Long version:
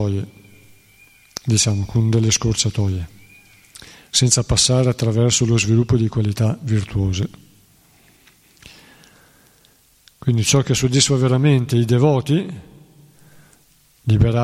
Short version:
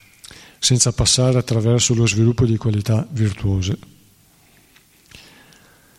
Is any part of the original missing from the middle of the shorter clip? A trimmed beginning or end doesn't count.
no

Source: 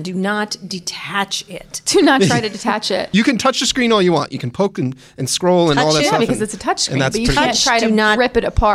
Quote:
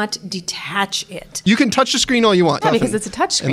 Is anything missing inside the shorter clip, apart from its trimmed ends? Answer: yes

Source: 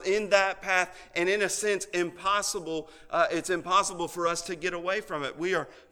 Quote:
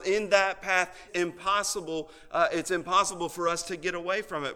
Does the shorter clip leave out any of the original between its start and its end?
yes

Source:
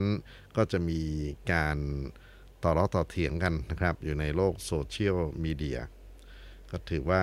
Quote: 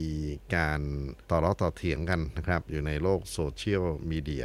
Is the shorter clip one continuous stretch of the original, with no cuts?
no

